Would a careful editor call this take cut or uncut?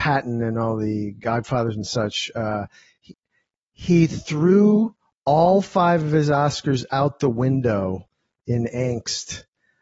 uncut